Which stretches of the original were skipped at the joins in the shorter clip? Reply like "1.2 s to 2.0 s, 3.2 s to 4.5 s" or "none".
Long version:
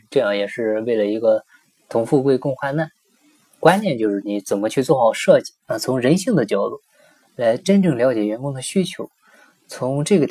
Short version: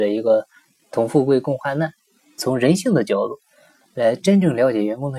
3.4 s to 5.8 s

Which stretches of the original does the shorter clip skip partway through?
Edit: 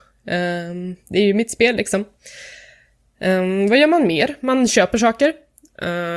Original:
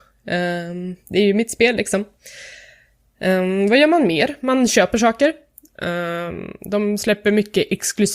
none

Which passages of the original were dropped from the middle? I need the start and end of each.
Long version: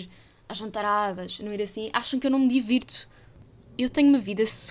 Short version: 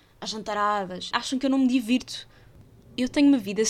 1.4 s to 1.9 s

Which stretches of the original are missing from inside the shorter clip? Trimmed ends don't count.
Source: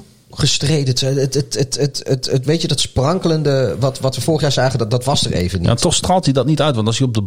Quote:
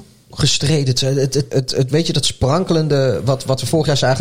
1.5 s to 2.0 s

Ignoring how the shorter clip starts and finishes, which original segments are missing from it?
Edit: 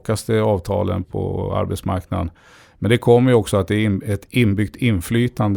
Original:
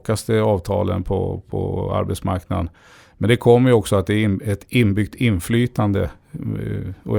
1.0 s to 1.4 s

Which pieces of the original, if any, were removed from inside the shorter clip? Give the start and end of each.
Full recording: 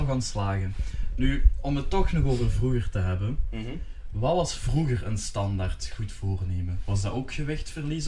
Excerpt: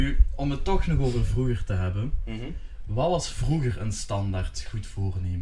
none

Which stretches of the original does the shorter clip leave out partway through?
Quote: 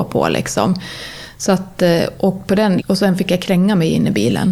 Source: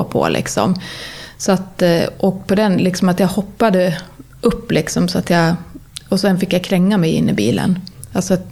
2.8 s to 6.0 s

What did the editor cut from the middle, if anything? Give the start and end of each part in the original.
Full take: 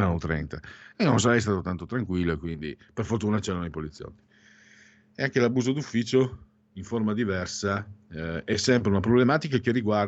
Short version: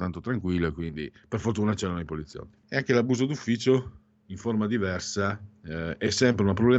4.3 s to 5.1 s

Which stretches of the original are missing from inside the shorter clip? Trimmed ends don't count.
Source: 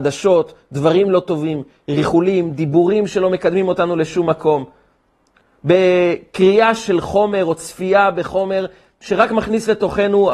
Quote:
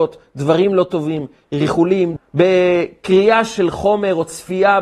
2.5 s to 5.5 s

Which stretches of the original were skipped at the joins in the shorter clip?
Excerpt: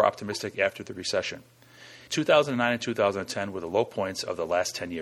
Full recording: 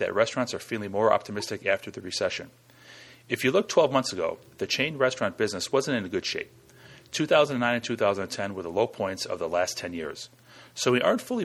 3.1 s to 7.1 s

